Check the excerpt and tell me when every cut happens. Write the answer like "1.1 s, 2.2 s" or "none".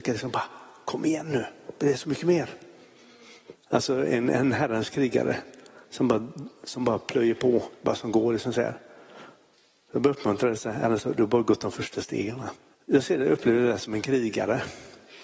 3.5 s, 12.7 s